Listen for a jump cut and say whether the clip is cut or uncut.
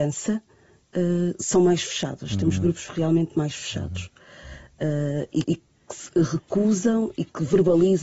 cut